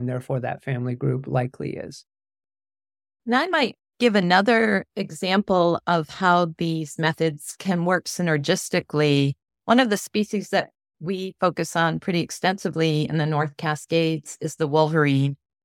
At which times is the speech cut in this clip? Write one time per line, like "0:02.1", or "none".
none